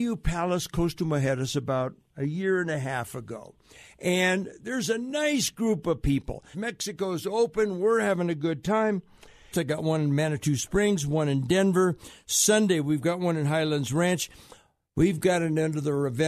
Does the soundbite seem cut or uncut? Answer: cut